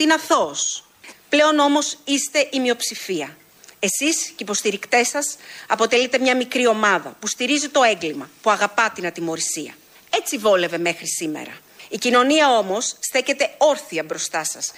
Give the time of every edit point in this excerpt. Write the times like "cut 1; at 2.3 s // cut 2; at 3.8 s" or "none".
cut 1; at 1.1 s